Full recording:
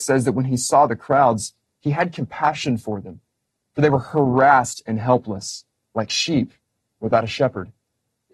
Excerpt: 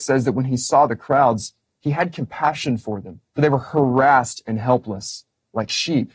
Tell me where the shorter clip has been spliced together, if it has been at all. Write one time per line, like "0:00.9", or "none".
0:03.3